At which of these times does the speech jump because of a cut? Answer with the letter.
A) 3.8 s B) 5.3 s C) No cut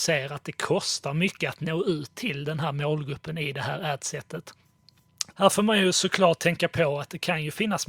B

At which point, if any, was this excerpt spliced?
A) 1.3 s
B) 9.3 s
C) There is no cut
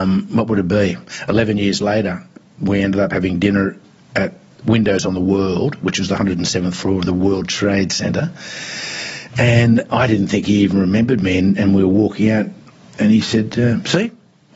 C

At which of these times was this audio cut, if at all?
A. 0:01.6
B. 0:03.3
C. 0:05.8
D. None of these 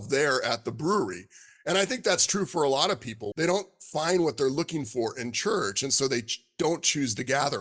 B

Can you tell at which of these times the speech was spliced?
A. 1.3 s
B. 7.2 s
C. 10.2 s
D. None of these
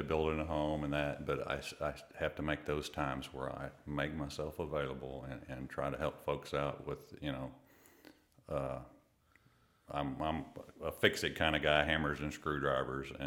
D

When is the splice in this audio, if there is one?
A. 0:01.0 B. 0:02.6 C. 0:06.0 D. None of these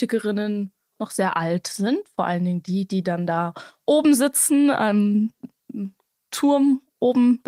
D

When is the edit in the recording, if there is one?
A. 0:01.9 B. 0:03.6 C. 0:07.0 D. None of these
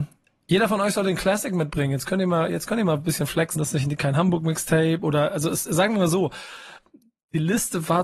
B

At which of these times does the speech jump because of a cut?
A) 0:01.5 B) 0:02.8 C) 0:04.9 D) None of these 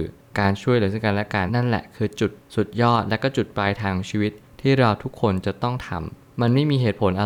A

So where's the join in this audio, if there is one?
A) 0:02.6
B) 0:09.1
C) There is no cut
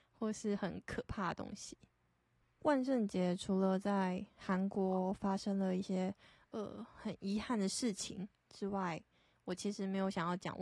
A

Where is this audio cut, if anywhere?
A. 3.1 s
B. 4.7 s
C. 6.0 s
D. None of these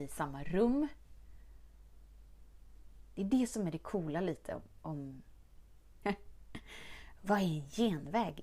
C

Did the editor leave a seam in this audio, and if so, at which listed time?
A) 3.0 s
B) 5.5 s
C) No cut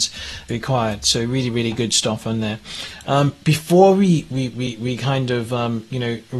A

